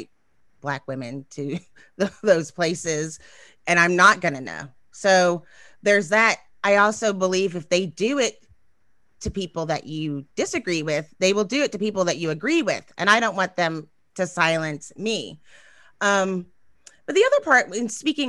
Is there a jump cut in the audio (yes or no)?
no